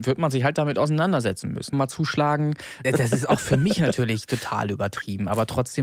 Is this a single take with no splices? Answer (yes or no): no